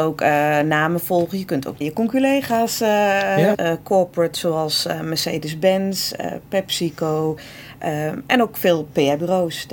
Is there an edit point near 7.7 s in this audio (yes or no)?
no